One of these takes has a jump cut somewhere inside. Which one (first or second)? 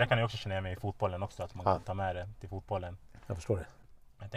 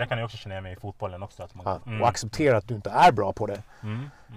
second